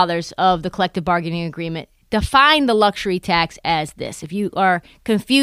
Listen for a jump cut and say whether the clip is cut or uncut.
uncut